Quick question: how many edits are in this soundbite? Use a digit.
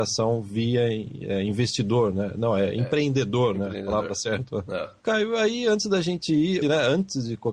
2